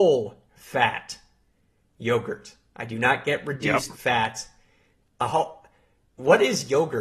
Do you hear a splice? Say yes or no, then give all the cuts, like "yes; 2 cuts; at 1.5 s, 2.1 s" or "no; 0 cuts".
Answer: yes; 1 cut; at 5.1 s